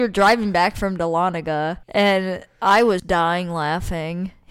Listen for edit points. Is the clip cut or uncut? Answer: cut